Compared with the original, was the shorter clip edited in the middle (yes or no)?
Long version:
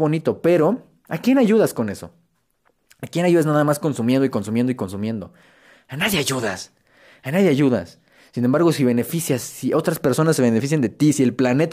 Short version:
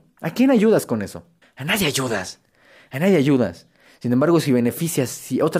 yes